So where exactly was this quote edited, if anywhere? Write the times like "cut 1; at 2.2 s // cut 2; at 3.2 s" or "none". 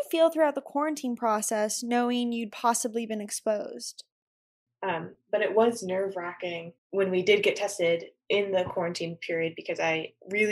cut 1; at 4.7 s // cut 2; at 6.8 s